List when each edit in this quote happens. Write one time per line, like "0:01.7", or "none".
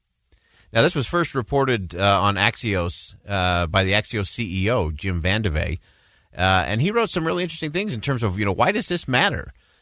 none